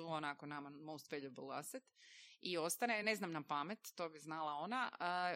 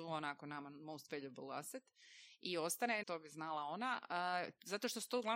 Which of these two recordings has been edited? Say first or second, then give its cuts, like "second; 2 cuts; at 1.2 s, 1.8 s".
second; 1 cut; at 3.0 s